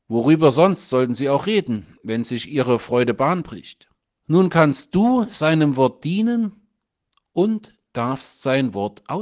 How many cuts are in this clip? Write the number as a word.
one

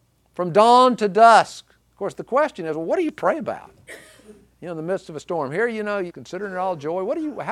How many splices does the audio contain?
two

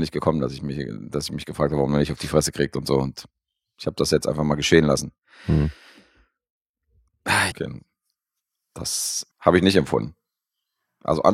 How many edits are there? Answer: two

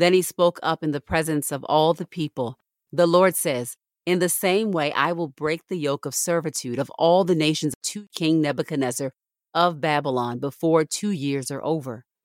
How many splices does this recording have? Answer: zero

